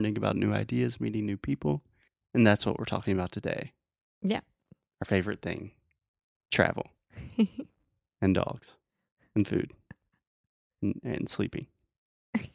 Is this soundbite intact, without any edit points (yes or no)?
yes